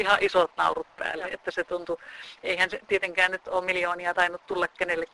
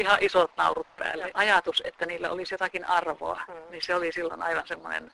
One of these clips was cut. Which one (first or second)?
second